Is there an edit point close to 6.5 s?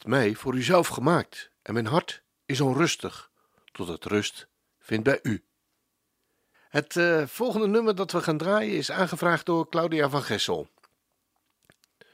yes; 1 cut; at 6.5 s

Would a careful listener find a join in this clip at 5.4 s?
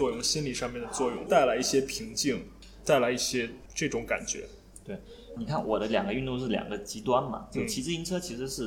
yes; 1 cut; at 5.4 s

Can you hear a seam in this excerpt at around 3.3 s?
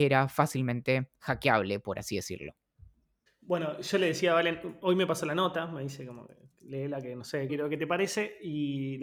yes; 2 cuts; at 3.3 s, 7.5 s

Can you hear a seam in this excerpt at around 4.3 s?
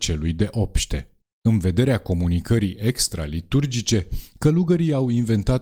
no; 1 cut; at 1.2 s

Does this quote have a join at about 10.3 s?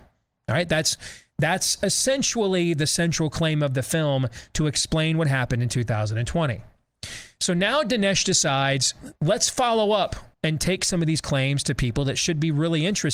yes; 2 cuts; at 9.2 s, 10.3 s

